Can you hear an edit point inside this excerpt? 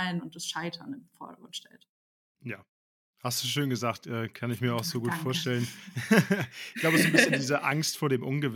no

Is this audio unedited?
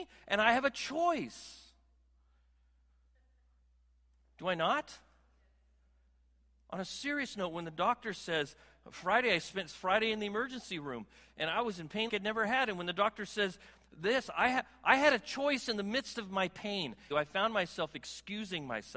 no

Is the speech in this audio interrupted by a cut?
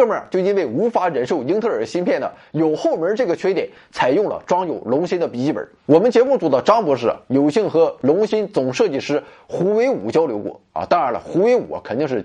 yes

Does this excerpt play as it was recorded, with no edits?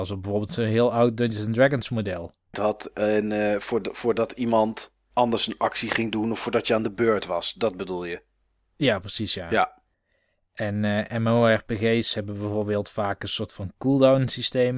no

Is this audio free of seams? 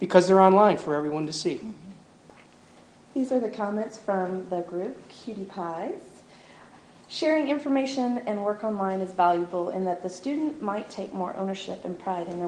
yes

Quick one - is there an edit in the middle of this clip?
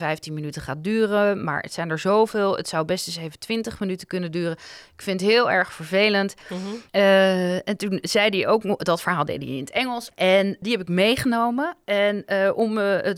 yes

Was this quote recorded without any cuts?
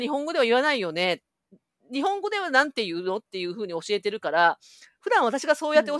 yes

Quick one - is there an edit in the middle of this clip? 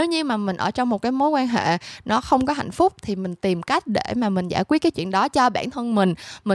no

